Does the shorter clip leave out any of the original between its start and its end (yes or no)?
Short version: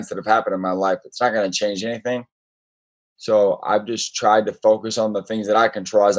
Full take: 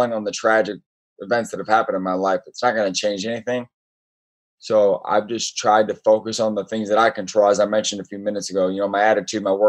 no